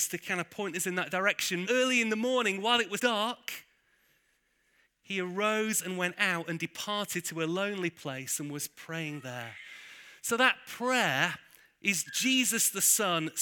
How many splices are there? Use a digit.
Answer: 3